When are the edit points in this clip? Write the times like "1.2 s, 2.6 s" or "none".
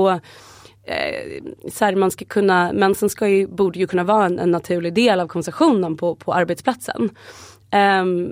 none